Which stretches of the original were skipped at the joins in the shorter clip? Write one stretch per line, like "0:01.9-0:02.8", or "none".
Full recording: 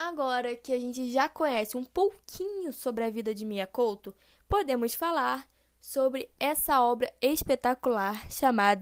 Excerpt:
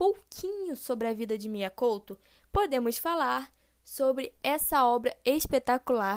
none